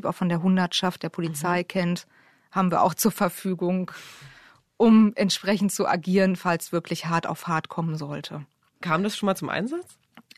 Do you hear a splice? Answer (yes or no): no